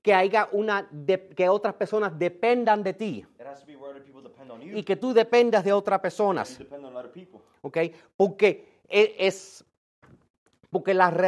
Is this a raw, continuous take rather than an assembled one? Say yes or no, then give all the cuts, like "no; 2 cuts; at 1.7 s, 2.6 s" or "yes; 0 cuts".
yes; 0 cuts